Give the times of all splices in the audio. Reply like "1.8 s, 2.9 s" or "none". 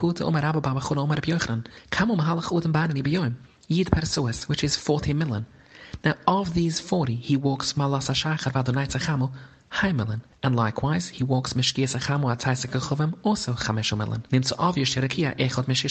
14.3 s